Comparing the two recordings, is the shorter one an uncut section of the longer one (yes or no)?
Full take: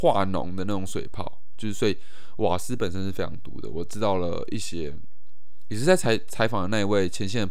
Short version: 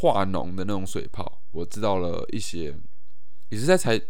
no